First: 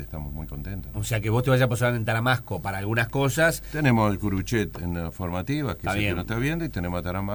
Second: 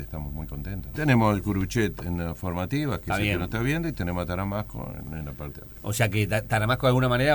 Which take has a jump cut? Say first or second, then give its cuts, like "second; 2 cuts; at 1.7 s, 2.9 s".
second; 1 cut; at 0.9 s